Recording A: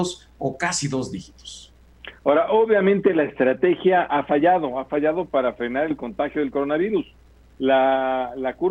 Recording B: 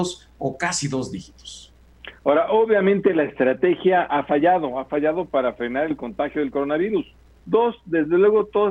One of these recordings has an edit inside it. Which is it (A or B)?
B